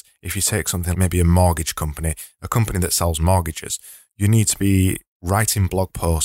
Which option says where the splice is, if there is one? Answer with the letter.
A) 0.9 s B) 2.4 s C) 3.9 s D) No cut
A